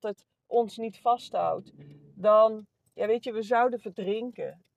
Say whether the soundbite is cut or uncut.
uncut